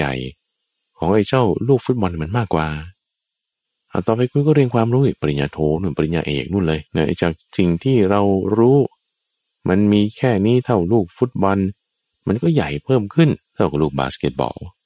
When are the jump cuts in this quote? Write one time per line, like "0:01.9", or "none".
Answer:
0:06.9
0:13.5